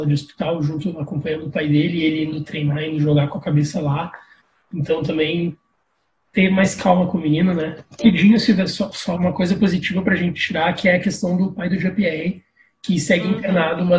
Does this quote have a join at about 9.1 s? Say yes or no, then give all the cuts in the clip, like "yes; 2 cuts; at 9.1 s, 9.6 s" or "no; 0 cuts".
yes; 2 cuts; at 8.0 s, 9.1 s